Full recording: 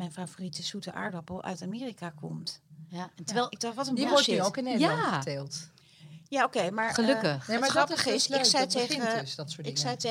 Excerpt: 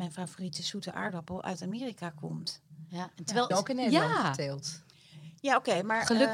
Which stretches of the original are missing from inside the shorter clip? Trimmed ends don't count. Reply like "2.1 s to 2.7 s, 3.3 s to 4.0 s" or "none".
3.5 s to 4.4 s

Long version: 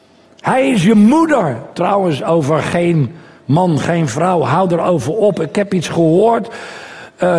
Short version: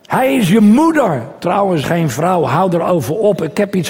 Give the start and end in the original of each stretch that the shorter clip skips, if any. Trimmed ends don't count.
2.2 s to 3.8 s

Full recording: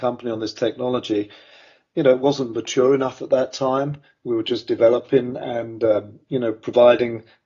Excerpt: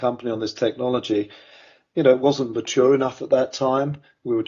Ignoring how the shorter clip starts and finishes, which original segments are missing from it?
none

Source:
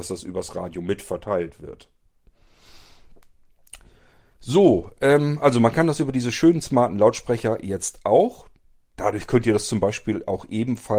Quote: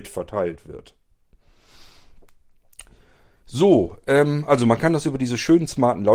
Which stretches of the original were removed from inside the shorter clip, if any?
none

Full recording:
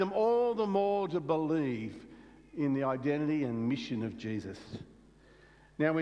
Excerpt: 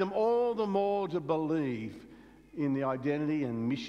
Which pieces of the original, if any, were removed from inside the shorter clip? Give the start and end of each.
none

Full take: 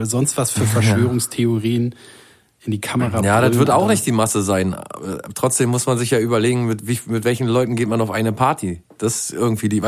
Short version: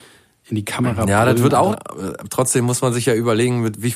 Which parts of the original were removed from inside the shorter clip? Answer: 3.9 s to 4.8 s

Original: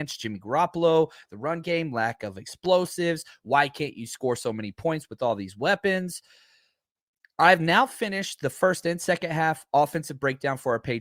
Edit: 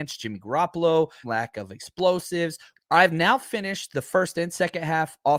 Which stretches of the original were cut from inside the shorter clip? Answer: 1.2 s to 1.9 s, 3.4 s to 7.2 s

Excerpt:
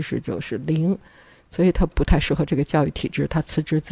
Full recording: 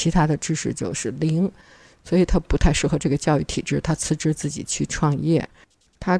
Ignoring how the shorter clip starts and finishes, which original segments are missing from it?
none

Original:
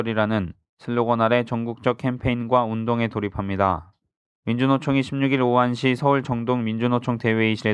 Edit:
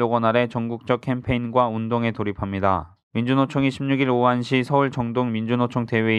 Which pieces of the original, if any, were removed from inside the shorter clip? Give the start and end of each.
4.0 s to 4.3 s

